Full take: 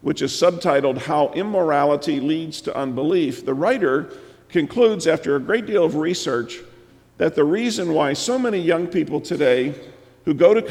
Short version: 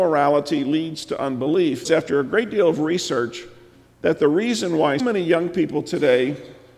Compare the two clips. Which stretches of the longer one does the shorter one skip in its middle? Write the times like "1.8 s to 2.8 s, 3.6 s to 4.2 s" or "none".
3.4 s to 5.0 s, 8.2 s to 8.4 s